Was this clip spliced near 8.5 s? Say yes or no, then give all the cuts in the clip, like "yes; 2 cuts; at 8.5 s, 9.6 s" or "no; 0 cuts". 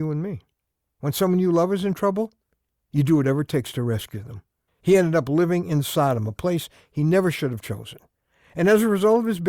no; 1 cut; at 4.7 s